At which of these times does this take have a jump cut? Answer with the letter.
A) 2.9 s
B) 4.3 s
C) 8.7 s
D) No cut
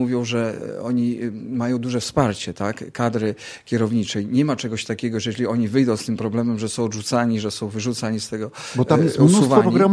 D